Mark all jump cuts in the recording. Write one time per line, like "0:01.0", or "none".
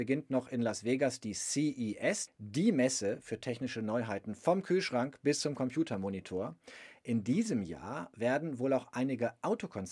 0:02.3